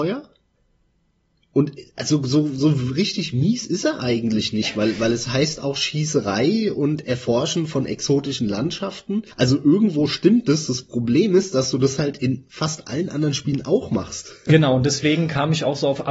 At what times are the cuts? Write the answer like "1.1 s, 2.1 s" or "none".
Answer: 9.3 s

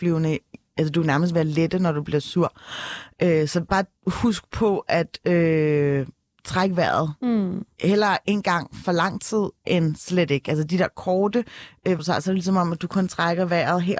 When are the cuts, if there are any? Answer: 12.0 s

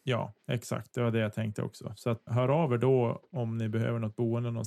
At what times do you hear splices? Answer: 2.3 s

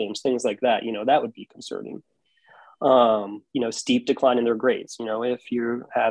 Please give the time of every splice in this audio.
3.5 s

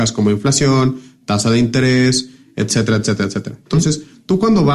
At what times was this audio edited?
none

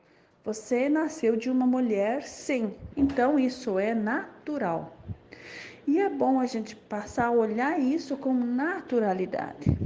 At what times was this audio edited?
2.9 s

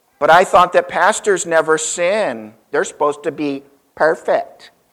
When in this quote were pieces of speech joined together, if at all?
2.7 s

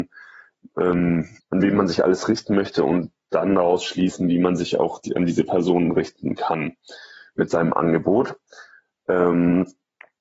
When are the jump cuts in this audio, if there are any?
1.4 s

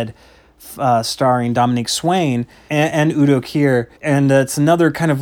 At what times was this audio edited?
2.7 s, 4.0 s

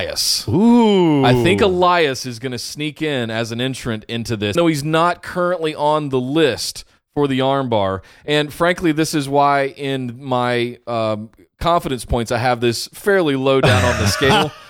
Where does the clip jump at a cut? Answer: 4.6 s

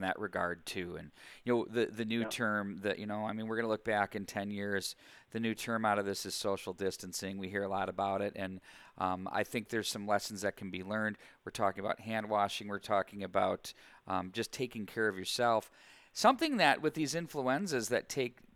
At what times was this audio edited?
none

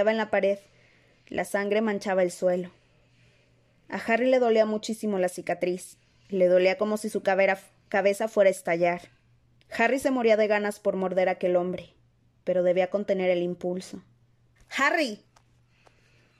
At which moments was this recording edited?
9.6 s, 14.6 s

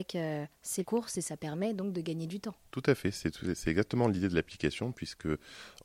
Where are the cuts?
none

